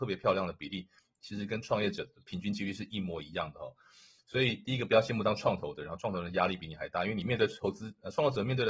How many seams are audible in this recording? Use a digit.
0